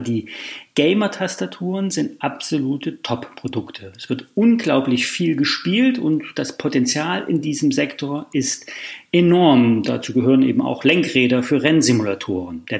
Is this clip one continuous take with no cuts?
yes; 0 cuts

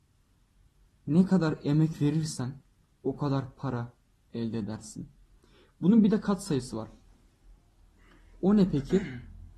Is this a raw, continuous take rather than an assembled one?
yes; 0 cuts

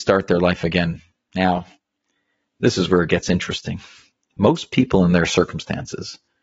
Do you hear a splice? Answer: no; 0 cuts

